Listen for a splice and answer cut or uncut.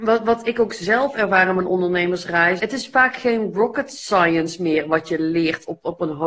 cut